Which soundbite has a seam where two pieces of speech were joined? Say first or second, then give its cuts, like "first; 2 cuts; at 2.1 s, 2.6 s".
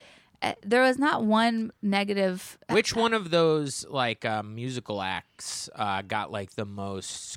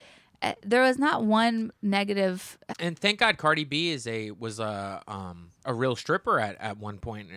second; 2 cuts; at 2.7 s, 5.6 s